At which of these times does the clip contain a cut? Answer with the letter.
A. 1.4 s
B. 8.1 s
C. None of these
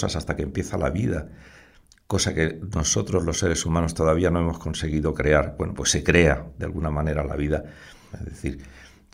B